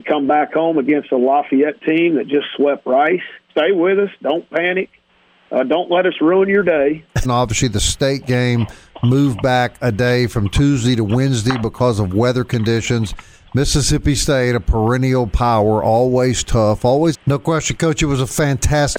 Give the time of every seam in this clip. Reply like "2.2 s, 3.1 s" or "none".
3.5 s, 7.2 s, 17.1 s